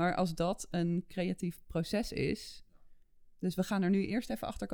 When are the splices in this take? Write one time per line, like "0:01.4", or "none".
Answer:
none